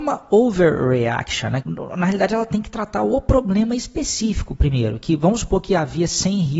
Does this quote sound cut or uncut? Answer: cut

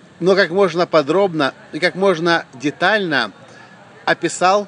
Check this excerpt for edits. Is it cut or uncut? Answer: uncut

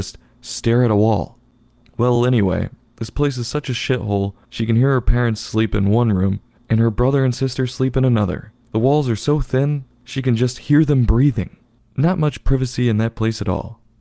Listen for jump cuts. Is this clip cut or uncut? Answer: uncut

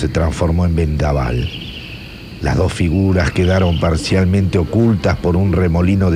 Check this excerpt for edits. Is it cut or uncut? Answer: uncut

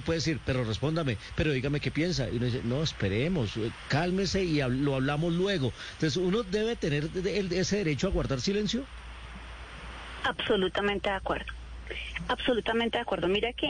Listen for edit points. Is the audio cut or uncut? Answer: uncut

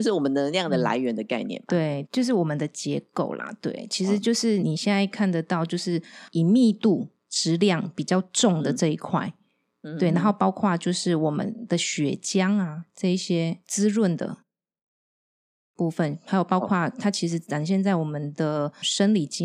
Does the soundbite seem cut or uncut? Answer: cut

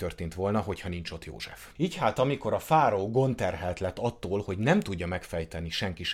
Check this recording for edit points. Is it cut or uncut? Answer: cut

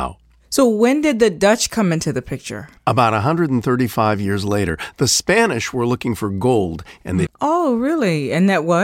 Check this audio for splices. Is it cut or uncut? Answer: cut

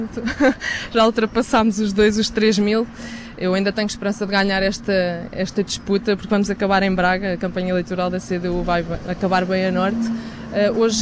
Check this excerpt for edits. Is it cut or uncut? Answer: uncut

